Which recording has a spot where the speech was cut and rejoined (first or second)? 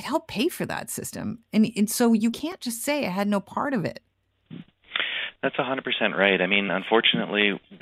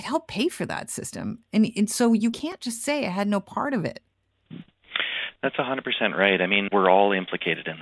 second